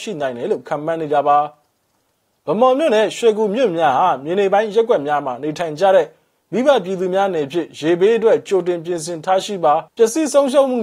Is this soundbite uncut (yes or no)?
no